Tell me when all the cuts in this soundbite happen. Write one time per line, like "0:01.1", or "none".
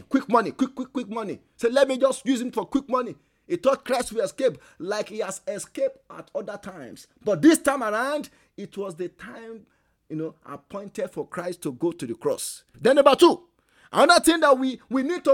0:12.7